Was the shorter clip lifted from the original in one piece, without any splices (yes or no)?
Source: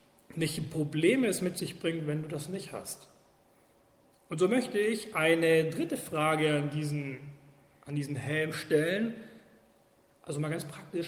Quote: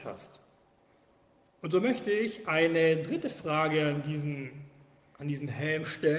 yes